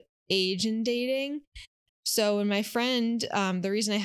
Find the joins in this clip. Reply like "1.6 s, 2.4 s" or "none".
1.9 s